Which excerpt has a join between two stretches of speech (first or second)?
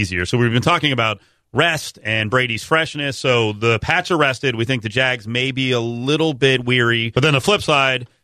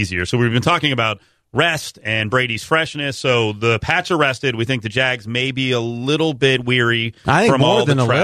first